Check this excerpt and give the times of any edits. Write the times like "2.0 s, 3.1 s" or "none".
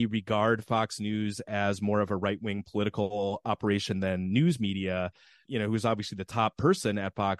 5.5 s